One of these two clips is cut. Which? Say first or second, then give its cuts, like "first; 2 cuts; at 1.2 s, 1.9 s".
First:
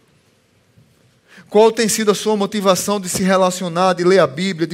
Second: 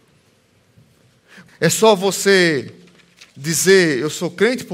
second; 2 cuts; at 1.5 s, 3.3 s